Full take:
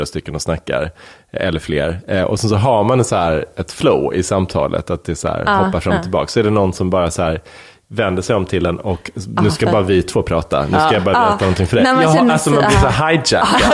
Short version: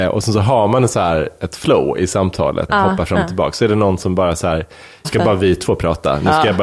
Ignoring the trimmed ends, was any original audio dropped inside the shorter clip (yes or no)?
yes